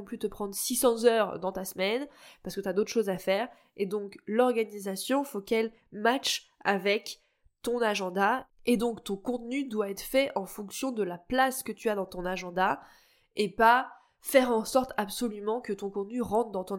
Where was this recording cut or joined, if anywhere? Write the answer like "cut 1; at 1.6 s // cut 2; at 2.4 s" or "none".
none